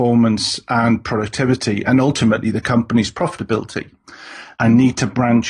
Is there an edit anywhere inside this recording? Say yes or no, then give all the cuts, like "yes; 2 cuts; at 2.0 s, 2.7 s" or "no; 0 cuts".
yes; 1 cut; at 4.5 s